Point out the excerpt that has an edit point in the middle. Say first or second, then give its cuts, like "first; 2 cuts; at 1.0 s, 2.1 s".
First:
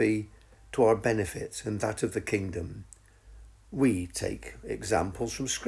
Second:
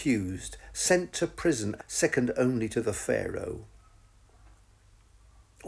second; 1 cut; at 1.8 s